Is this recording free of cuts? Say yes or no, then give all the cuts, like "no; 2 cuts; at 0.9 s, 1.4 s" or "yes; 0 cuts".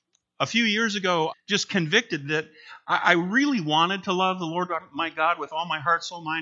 no; 1 cut; at 1.3 s